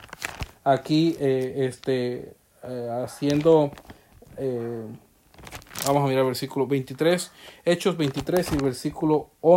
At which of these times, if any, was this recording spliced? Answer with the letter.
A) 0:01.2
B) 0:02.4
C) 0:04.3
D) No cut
D